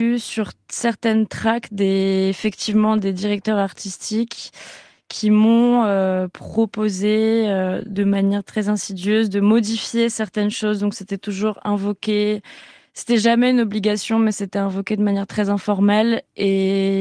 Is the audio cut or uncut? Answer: uncut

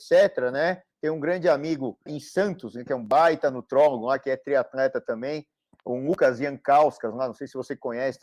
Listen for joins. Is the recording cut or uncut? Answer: cut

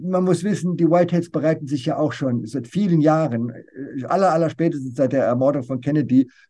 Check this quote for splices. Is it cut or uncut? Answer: cut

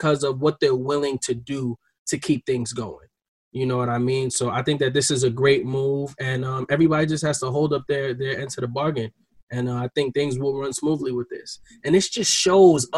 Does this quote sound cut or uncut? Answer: uncut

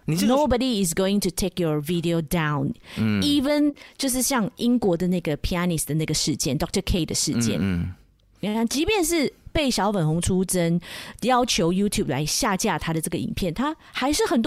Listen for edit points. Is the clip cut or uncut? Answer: uncut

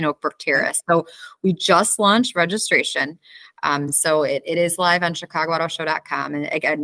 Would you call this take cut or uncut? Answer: uncut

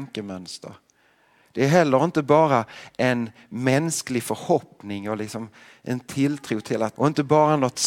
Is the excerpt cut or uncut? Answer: cut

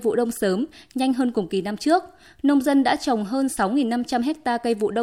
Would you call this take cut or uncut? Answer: uncut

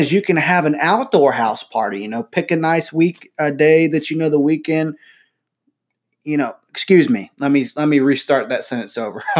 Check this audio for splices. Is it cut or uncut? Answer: uncut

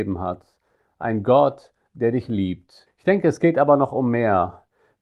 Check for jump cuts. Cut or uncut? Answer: cut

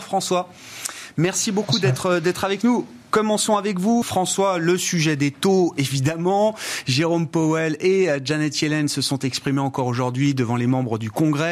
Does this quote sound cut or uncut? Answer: cut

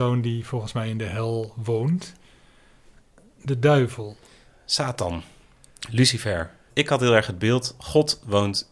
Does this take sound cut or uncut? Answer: uncut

